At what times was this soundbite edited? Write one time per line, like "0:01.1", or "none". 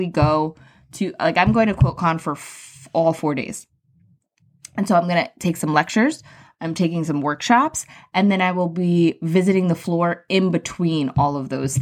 none